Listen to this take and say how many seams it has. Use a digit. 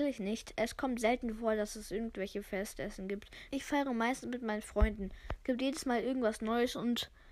1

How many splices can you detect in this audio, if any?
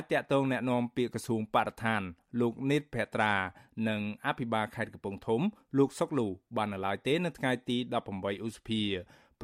0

